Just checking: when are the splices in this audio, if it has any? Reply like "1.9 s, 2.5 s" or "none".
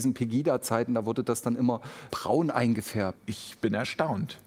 2.1 s, 3.1 s